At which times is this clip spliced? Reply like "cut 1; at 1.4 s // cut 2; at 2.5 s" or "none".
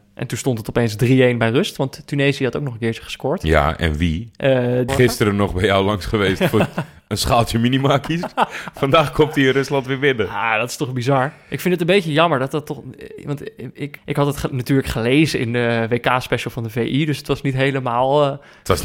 cut 1; at 4.9 s // cut 2; at 14.0 s